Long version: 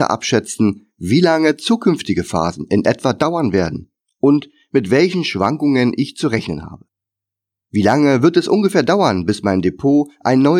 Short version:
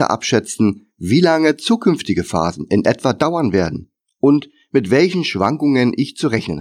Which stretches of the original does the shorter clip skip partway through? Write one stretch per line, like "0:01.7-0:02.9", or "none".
none